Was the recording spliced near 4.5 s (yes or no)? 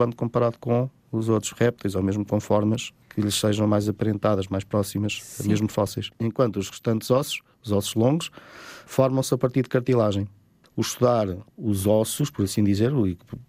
no